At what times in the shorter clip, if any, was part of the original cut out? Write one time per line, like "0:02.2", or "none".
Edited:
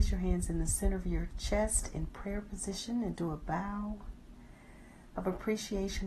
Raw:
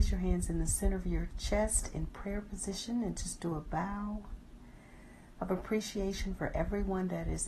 0:03.1